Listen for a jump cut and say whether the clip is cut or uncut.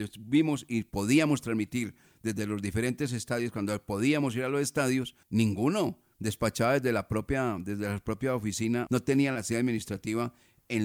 cut